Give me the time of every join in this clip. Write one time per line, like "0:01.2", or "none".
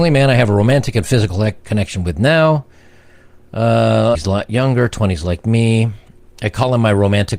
0:04.1